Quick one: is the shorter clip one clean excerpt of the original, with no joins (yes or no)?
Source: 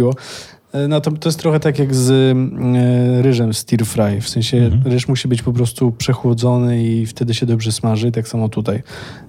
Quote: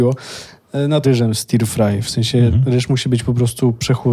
no